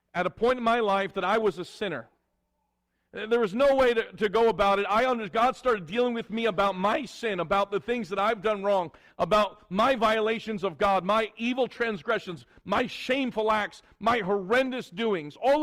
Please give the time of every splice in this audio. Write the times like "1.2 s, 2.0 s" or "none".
none